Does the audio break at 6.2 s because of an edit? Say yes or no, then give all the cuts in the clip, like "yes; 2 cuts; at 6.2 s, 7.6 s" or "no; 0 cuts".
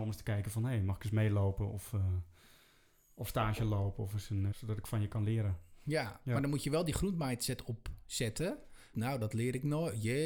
no; 2 cuts; at 4.5 s, 8.9 s